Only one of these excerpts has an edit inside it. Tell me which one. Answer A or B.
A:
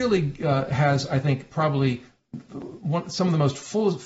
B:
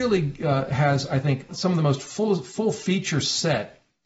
B